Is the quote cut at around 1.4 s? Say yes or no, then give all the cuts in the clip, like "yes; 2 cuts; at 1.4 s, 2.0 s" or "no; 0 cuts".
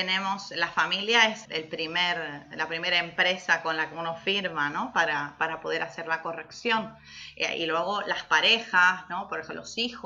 yes; 1 cut; at 1.4 s